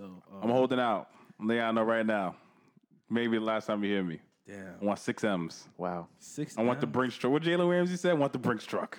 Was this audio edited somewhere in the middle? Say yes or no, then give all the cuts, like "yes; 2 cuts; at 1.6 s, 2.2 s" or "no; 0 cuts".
no; 0 cuts